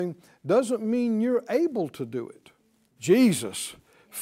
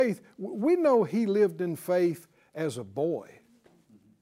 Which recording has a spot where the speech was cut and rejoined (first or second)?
first